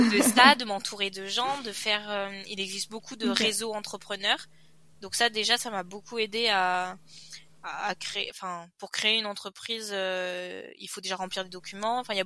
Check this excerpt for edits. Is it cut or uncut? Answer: uncut